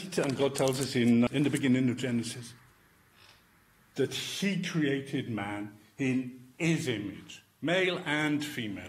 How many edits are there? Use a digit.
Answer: 1